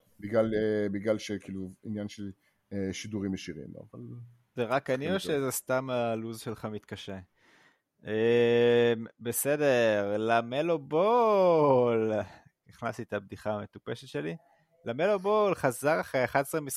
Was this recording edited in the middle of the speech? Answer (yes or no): no